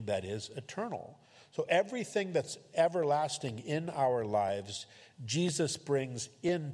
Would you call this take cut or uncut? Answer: uncut